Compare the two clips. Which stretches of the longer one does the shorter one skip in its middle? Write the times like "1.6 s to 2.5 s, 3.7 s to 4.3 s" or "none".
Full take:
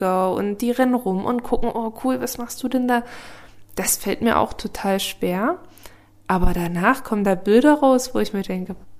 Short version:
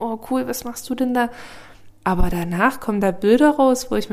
3.6 s to 6.1 s